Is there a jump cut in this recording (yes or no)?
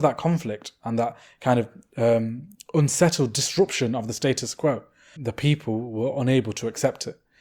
yes